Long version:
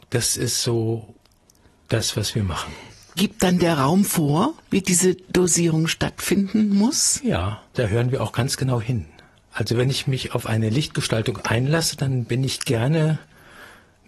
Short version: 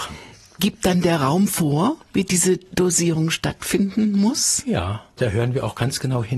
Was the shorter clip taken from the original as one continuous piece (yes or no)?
yes